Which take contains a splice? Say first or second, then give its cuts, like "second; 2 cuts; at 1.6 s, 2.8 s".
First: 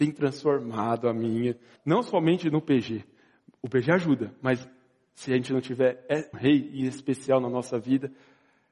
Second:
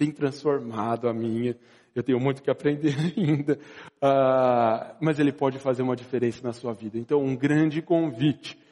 first; 2 cuts; at 1.8 s, 6.3 s